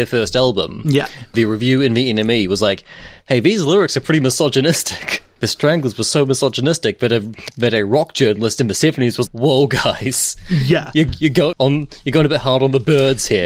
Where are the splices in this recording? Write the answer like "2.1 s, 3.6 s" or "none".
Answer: 9.3 s, 11.5 s